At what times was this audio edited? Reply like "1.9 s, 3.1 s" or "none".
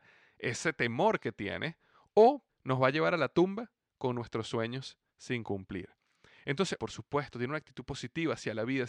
2.5 s, 6.8 s